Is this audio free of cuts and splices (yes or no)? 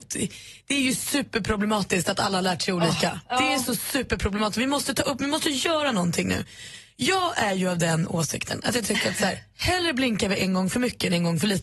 yes